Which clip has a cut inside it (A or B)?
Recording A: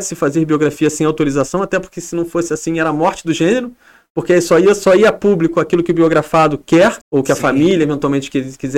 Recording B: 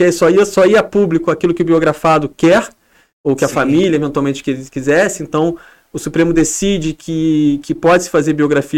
A